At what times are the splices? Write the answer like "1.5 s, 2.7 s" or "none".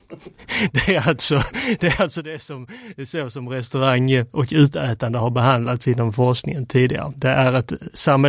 none